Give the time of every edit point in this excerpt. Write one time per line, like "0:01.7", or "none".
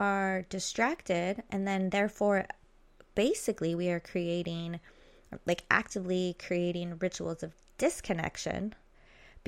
none